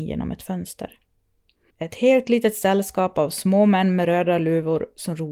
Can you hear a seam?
yes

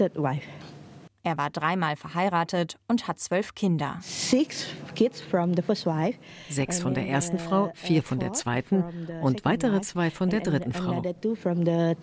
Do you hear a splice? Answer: yes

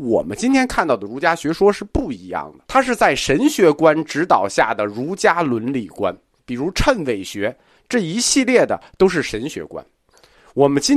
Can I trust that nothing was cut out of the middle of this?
no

